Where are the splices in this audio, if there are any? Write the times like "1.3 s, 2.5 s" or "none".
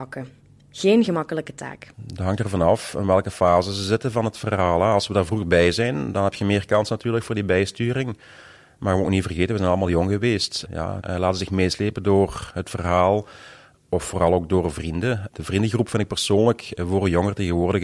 1.9 s, 11.0 s